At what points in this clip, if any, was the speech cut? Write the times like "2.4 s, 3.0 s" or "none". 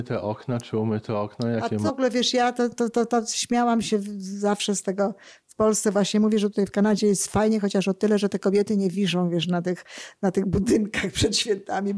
1.9 s